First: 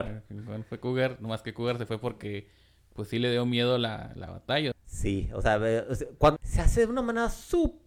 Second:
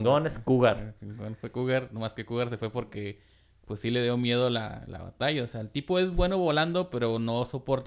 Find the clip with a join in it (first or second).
first